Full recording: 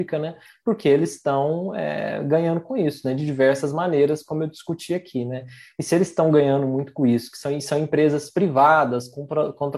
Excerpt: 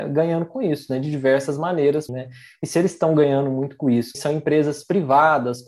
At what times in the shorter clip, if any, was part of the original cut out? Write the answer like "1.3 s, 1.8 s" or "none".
2.1 s, 4.1 s

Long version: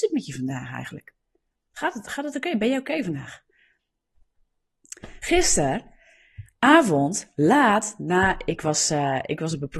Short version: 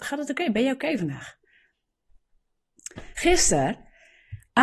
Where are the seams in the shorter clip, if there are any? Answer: none

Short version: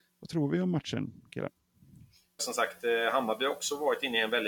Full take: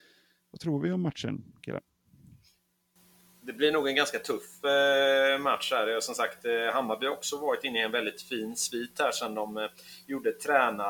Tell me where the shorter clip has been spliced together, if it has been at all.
2.4 s

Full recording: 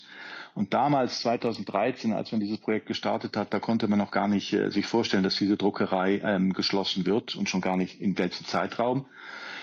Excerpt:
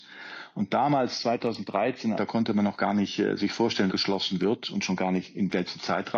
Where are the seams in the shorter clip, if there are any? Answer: 2.1 s, 3.9 s

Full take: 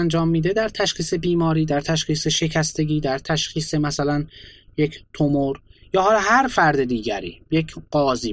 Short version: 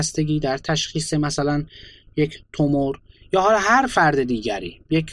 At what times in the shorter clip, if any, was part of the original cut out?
none

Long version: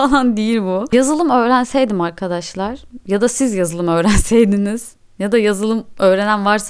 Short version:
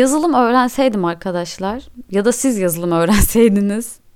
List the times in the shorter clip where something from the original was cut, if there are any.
none

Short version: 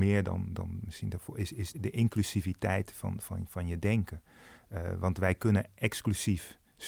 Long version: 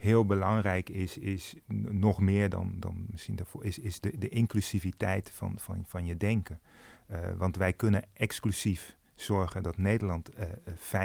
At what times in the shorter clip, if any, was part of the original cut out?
1.7 s

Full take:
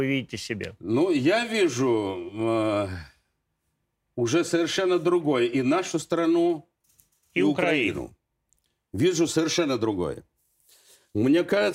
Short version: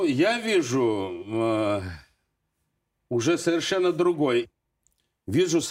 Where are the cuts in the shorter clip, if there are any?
4.4 s

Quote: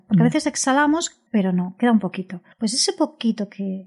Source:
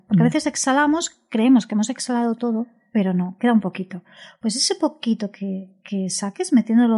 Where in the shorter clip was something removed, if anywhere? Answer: 1.3 s, 2.5 s

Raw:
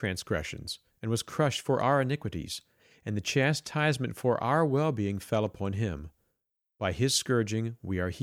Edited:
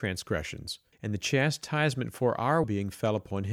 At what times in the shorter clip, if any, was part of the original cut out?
0.9 s, 2.6 s

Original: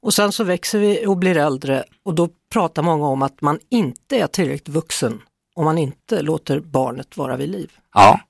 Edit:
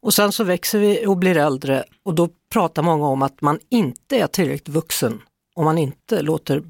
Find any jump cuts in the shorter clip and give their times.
none

